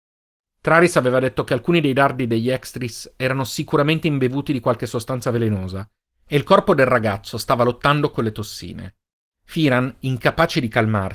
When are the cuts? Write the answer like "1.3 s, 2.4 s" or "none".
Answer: 9.3 s